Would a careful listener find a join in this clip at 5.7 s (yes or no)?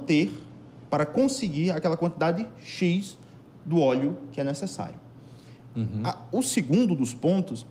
yes